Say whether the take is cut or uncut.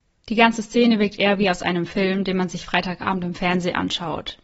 uncut